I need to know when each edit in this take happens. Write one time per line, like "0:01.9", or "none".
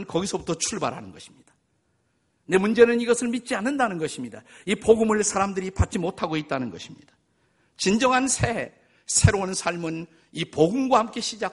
none